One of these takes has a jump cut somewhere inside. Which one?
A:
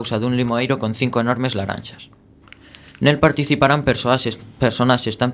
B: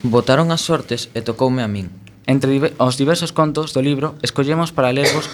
B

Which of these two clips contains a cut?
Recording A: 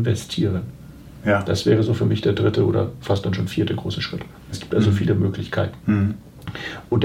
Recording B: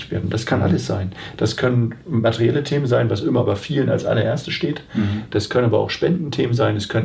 A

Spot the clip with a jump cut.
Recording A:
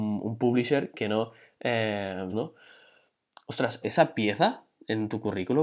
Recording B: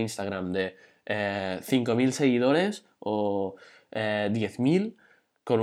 A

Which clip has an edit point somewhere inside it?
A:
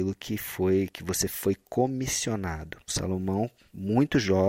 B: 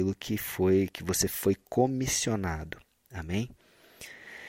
A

